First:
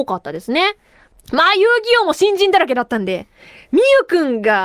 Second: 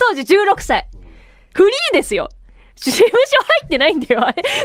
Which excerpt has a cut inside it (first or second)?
first